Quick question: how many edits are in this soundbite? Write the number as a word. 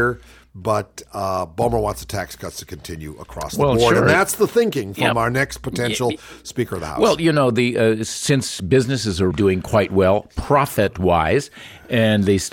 one